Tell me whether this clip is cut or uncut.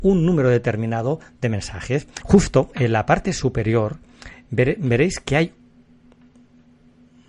cut